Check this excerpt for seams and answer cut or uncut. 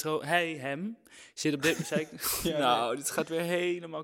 uncut